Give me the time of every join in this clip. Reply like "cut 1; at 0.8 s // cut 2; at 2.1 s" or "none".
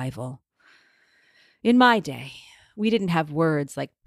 none